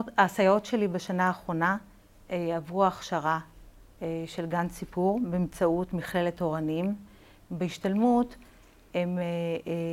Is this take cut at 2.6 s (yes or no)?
no